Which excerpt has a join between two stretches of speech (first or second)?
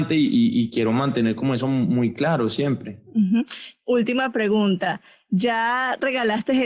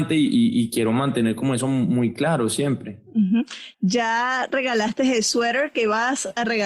second